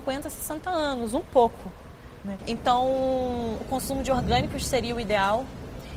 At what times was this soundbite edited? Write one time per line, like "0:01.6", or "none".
0:02.4
0:03.6